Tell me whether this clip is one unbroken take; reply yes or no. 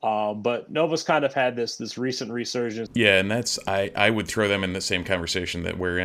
no